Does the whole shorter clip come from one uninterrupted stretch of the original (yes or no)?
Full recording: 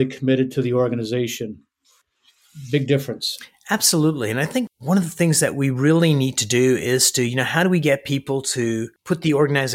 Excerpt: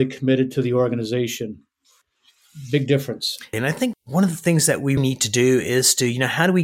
no